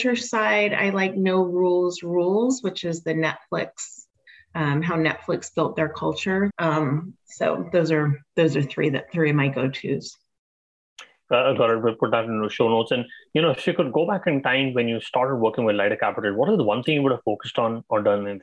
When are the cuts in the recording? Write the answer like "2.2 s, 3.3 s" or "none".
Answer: 6.5 s

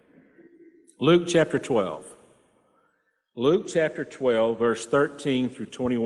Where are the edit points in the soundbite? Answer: none

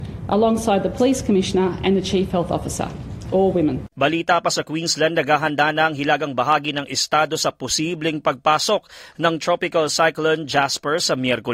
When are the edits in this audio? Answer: 3.9 s

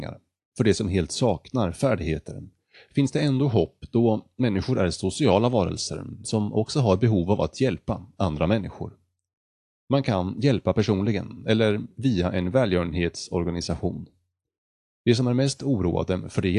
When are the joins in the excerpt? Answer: none

